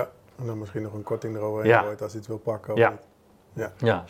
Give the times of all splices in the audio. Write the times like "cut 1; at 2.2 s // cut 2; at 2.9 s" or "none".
none